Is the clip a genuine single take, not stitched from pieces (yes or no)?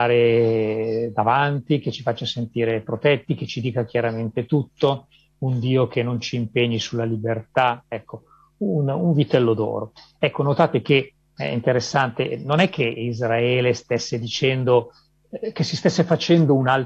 yes